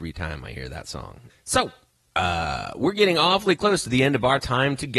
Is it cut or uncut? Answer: cut